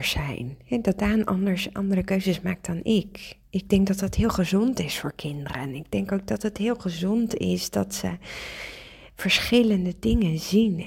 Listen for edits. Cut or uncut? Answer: uncut